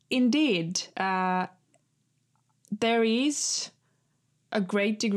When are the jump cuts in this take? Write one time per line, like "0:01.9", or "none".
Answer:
none